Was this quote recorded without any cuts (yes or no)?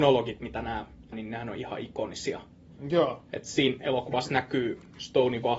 no